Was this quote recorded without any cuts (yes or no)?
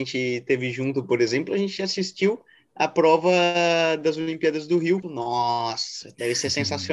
no